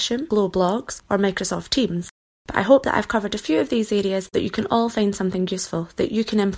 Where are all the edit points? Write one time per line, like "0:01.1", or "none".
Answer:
0:04.3